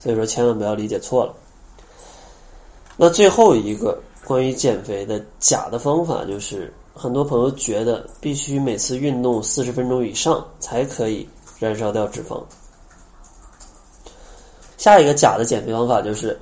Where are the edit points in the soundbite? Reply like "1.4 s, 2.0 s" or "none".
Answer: 14.7 s